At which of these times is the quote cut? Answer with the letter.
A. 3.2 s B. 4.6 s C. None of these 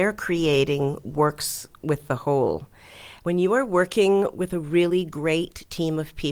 A